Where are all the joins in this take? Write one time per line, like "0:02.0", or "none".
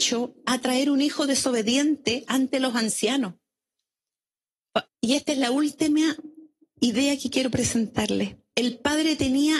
0:04.9
0:08.5